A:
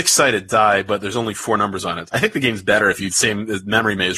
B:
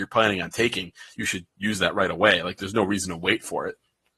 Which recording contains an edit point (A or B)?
A